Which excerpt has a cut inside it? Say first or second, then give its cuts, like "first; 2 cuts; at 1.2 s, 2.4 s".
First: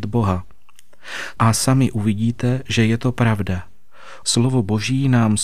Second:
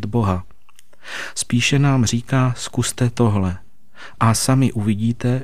first; 2 cuts; at 1.3 s, 4.2 s